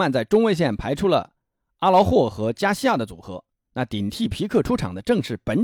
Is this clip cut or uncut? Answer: cut